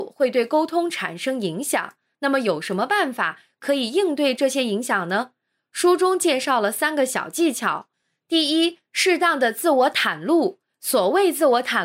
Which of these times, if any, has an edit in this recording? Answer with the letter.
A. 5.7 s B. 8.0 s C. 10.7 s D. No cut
D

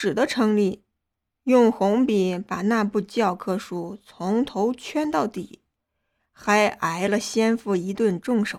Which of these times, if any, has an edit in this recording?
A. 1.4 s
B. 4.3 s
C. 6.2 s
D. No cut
C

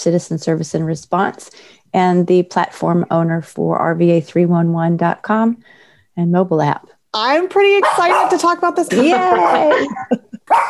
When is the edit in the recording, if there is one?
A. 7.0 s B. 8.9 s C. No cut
B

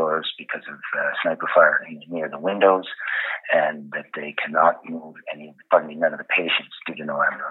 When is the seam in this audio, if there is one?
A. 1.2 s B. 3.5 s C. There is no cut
C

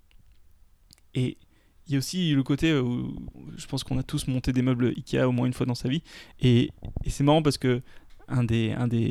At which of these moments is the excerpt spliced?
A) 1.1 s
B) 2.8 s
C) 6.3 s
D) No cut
C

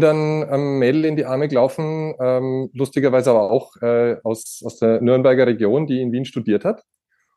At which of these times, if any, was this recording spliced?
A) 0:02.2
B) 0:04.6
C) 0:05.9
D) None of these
D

